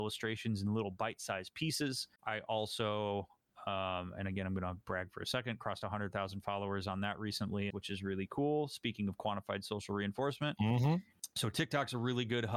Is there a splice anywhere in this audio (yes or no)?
yes